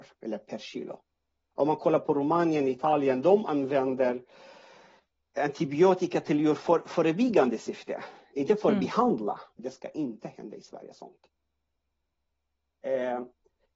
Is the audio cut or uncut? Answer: cut